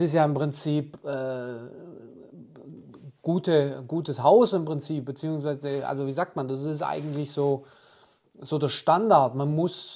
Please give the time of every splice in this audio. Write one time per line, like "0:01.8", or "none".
none